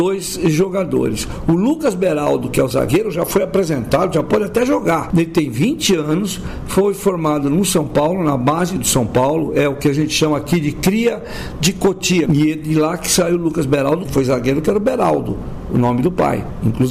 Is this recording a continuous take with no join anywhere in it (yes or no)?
no